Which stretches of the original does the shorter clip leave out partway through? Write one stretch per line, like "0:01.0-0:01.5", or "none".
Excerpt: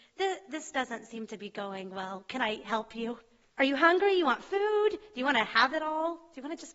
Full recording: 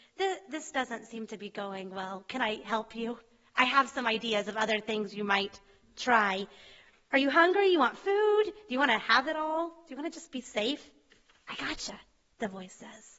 0:03.4-0:07.0